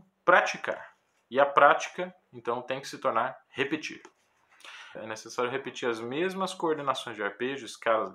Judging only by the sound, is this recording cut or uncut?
cut